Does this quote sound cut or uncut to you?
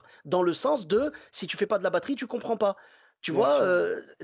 uncut